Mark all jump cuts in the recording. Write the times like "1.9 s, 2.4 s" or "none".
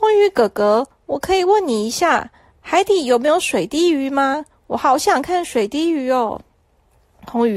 none